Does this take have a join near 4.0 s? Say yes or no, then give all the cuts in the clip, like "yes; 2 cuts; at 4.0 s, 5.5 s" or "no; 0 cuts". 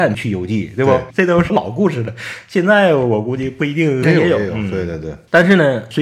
yes; 1 cut; at 4.0 s